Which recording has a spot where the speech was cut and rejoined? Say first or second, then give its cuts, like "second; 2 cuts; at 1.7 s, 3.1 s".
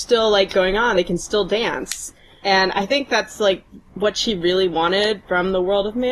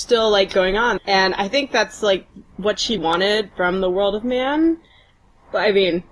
second; 2 cuts; at 1.0 s, 3.0 s